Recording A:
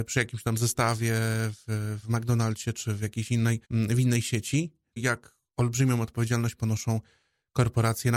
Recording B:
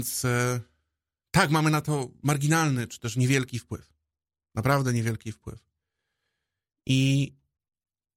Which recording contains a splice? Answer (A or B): A